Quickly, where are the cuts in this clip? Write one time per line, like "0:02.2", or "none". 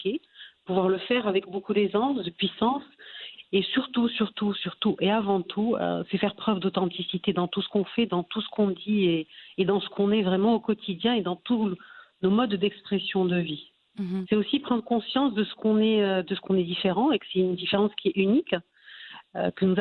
0:14.3